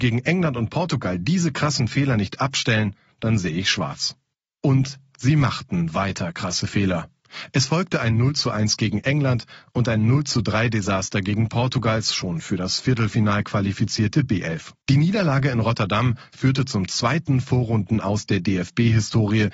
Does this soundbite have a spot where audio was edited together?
no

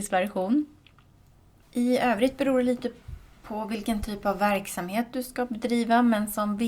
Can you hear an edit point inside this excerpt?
yes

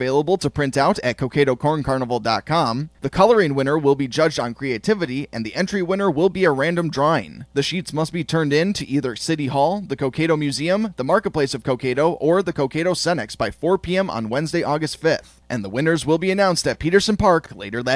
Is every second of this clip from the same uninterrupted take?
yes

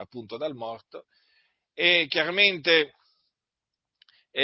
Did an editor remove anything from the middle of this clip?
no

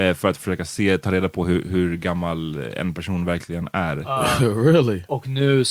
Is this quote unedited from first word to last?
yes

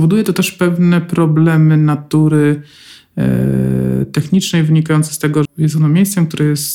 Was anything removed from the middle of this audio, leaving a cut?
yes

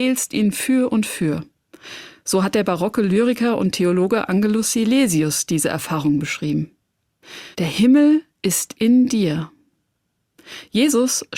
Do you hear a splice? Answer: yes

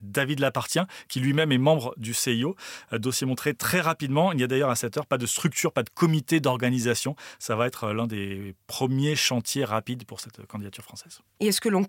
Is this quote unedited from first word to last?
yes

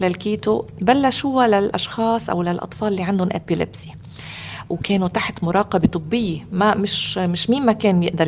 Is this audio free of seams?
yes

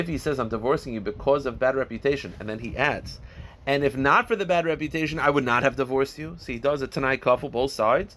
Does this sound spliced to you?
no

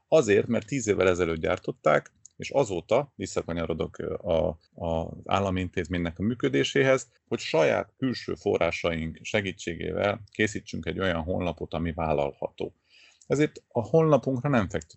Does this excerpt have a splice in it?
yes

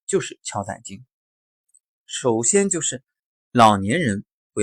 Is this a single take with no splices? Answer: no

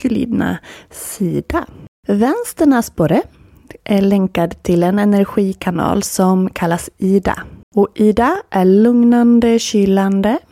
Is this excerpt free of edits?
no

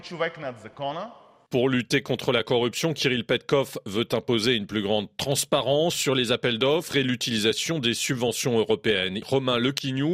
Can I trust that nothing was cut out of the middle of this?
no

